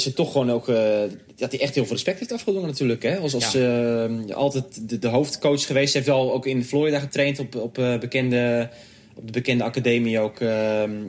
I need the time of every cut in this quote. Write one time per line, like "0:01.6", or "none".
none